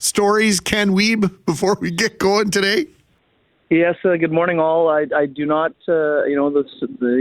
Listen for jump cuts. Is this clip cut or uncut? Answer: uncut